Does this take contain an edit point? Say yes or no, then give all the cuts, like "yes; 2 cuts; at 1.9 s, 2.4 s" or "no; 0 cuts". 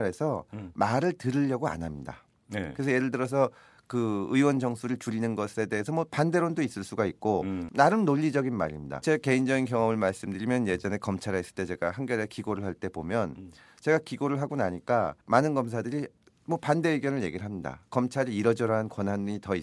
yes; 3 cuts; at 7.7 s, 9.0 s, 15.2 s